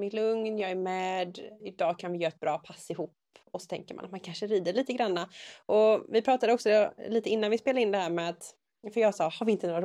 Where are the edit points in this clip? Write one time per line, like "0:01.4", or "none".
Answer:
0:01.6